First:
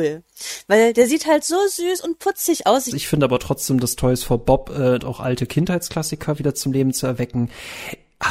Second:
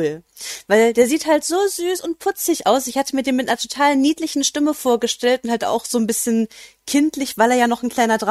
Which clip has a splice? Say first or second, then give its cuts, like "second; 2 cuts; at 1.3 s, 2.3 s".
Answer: first; 2 cuts; at 2.9 s, 5.0 s